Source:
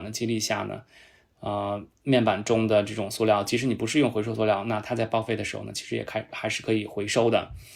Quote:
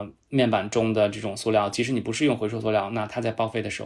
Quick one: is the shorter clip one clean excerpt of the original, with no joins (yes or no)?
yes